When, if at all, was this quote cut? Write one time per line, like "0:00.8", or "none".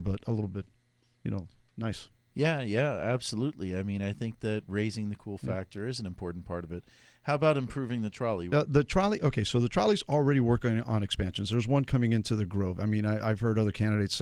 0:08.5

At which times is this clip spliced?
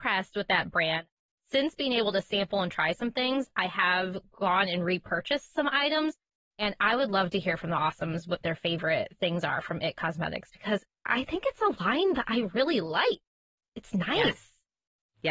none

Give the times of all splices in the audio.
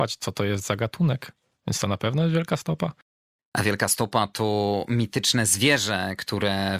none

